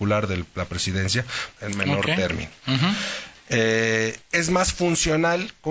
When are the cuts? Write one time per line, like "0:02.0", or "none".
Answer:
0:01.6
0:04.2